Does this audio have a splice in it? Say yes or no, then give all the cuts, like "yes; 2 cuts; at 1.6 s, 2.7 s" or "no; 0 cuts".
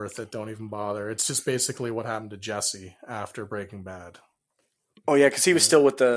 no; 0 cuts